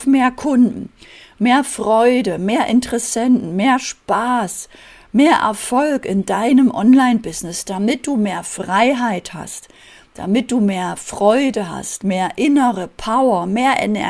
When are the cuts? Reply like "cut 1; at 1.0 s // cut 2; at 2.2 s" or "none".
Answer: none